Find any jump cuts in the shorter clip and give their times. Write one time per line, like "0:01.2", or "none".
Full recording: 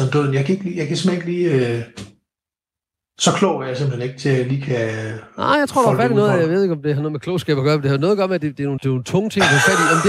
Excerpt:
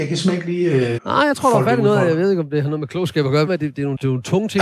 0:01.0
0:03.5